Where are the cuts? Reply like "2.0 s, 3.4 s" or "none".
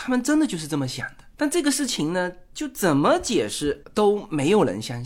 none